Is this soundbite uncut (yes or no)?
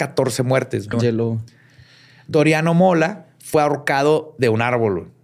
no